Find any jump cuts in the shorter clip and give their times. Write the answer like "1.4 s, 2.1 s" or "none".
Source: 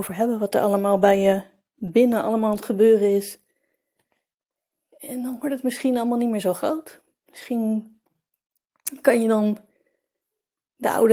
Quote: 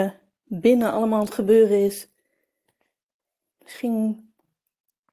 3.5 s